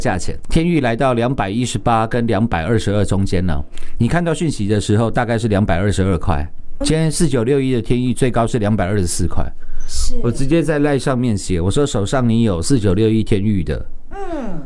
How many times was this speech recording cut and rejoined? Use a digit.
1